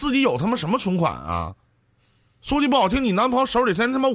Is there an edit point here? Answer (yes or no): no